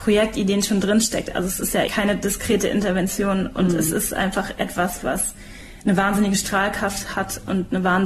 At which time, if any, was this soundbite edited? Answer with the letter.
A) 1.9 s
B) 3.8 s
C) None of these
A